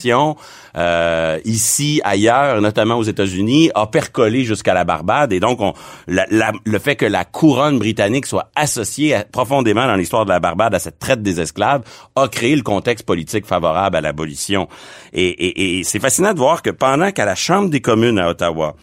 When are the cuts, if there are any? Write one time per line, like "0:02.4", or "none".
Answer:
none